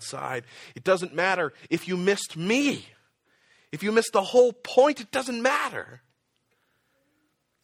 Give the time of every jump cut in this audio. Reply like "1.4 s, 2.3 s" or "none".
none

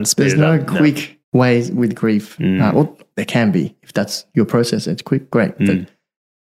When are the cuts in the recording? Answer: 1.2 s, 3.1 s

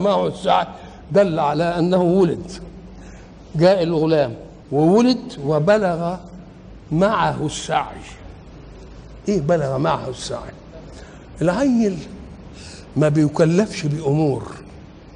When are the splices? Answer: 4.6 s

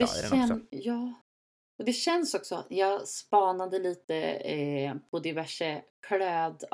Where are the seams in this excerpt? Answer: none

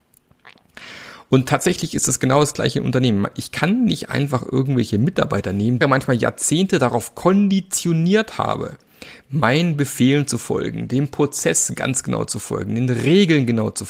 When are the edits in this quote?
5.8 s

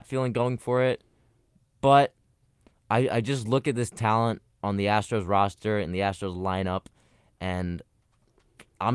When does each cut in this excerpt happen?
none

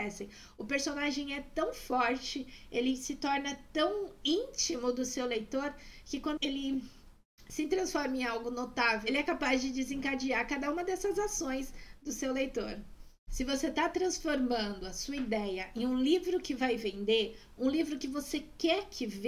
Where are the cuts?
6.4 s

